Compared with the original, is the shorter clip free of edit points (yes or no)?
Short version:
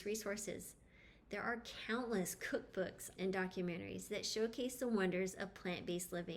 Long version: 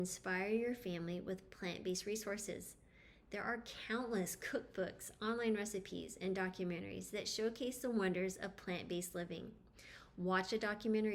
no